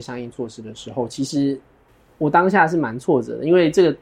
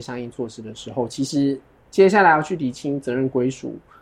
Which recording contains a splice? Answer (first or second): second